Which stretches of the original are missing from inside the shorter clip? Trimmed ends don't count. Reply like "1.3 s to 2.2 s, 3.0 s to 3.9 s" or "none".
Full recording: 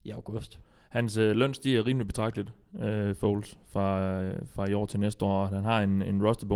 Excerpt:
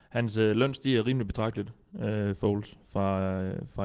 none